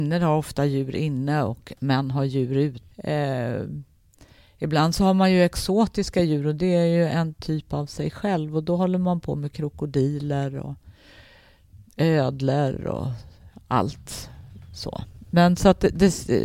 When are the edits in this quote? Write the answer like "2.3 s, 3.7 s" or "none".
2.9 s